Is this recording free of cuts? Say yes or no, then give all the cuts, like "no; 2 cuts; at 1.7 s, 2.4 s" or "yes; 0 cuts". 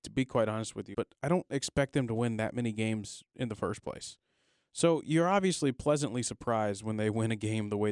no; 1 cut; at 0.9 s